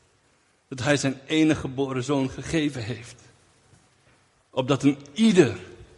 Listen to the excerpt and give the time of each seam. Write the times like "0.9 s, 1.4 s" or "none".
none

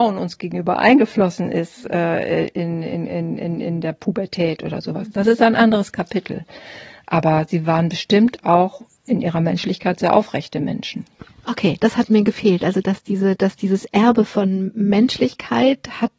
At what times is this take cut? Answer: none

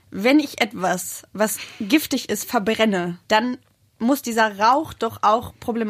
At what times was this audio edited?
3.2 s

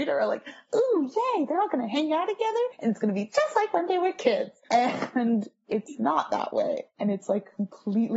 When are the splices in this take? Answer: none

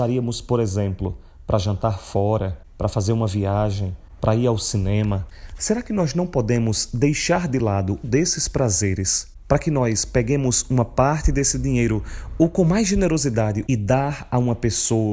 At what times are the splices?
4.2 s, 8.0 s, 13.7 s

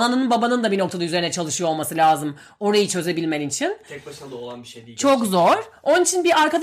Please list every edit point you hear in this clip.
none

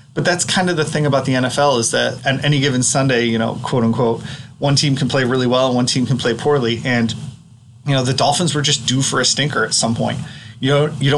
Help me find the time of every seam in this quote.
2.2 s

